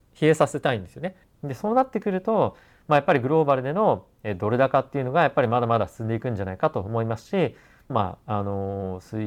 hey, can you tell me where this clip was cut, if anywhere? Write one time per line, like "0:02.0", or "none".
0:01.2
0:07.9